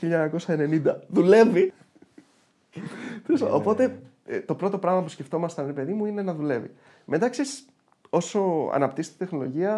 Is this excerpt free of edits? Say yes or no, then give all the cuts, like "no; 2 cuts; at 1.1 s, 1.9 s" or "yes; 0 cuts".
no; 1 cut; at 1.7 s